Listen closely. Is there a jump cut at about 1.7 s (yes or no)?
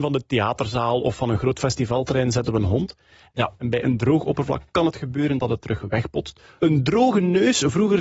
no